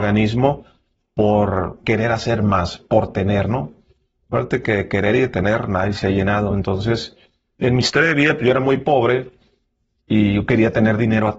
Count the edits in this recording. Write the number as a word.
zero